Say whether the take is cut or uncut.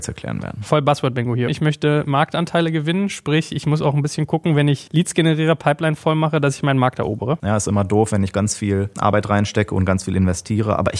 cut